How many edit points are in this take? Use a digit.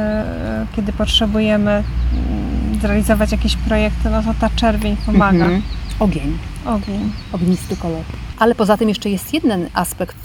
1